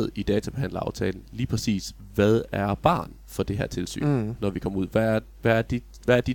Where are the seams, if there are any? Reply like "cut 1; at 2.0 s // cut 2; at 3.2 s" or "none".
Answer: none